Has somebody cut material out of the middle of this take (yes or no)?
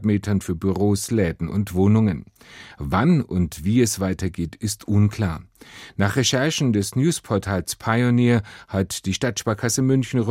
no